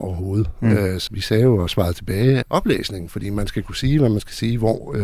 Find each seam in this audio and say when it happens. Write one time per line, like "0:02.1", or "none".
0:01.1
0:02.4